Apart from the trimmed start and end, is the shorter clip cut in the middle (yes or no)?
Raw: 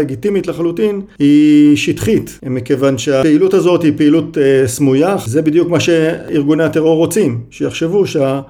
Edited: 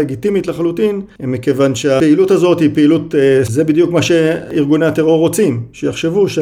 yes